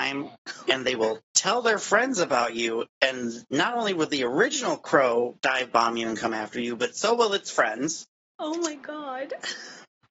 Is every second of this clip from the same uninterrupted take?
yes; 0 cuts

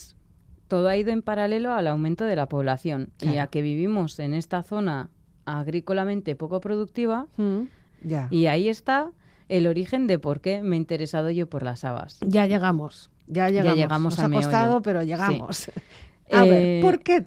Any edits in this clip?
yes; 1 cut; at 7.9 s

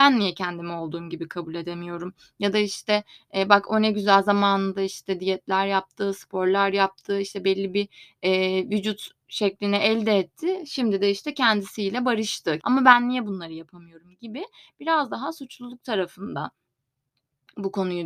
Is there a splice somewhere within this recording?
yes; 1 cut; at 12.6 s

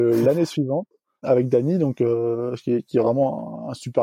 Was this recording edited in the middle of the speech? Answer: yes; 1 cut; at 1.2 s

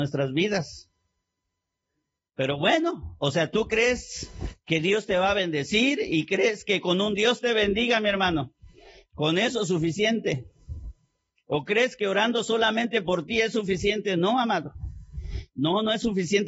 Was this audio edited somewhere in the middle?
no; 0 cuts

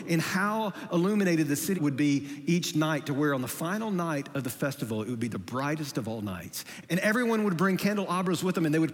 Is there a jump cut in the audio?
yes; 2 cuts; at 1.8 s, 6.8 s

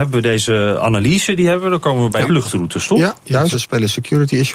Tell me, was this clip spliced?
yes; 2 cuts; at 2.3 s, 3.5 s

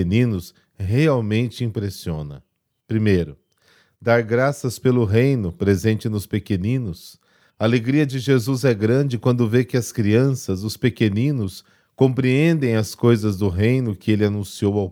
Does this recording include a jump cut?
no; 0 cuts

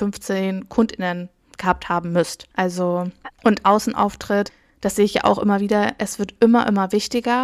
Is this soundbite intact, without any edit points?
no; 1 cut; at 3.3 s

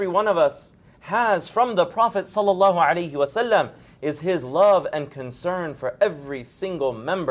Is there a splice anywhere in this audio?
no; 0 cuts

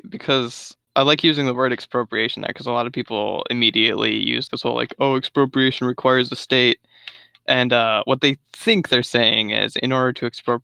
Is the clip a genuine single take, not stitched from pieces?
no; 1 cut; at 4.5 s

